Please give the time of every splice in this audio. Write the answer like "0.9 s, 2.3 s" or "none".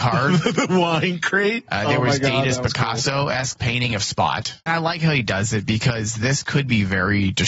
4.7 s